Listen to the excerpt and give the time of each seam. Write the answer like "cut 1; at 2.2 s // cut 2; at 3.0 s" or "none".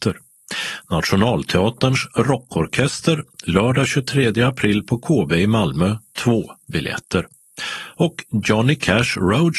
none